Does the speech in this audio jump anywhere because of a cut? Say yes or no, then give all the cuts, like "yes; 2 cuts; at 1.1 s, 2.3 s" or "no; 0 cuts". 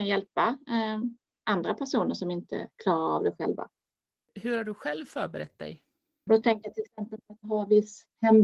yes; 1 cut; at 6.3 s